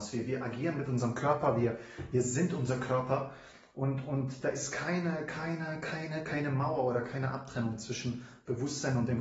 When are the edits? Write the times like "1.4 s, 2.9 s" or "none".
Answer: none